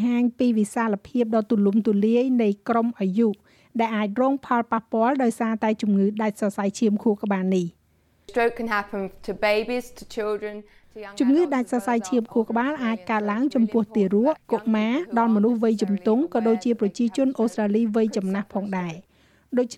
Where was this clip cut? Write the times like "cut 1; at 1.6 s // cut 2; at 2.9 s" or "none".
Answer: cut 1; at 14.4 s

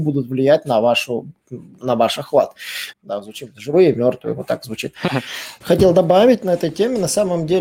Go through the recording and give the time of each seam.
cut 1; at 2.9 s // cut 2; at 5.6 s

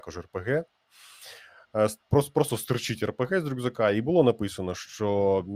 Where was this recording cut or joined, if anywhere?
none

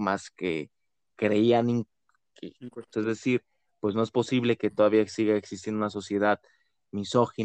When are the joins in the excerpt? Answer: cut 1; at 2.9 s

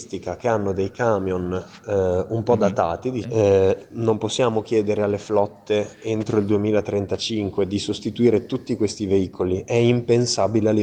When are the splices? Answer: cut 1; at 3.2 s

